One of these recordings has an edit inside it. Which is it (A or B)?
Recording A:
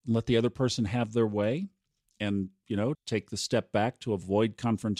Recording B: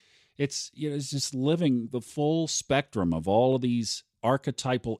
A